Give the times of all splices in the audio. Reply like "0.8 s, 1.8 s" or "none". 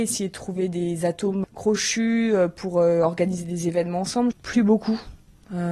1.4 s, 4.3 s